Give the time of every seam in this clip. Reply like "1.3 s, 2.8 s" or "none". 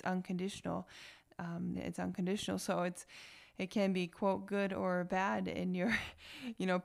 1.7 s